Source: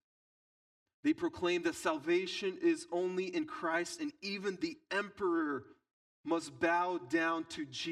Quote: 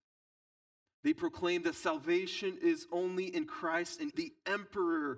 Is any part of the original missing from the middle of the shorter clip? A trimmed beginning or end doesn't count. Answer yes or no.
yes